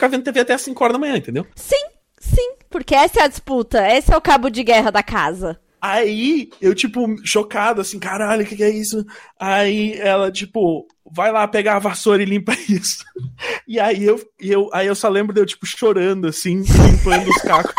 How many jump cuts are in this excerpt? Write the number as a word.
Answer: zero